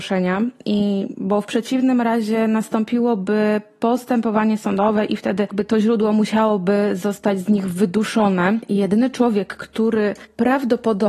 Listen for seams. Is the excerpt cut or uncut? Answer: uncut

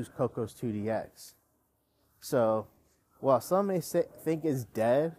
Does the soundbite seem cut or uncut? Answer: uncut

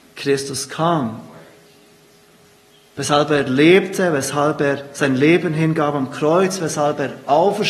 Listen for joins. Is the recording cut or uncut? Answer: uncut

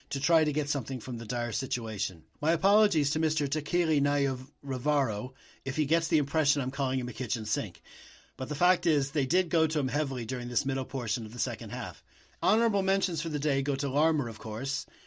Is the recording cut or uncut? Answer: cut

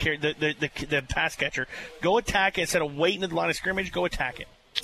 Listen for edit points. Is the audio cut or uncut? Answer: uncut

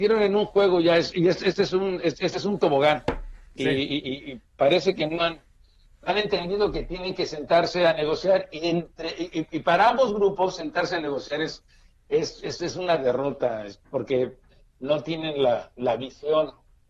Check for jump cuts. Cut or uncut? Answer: uncut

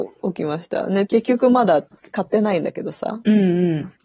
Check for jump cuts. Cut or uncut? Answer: cut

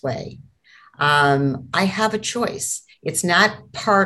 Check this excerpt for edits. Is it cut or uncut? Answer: uncut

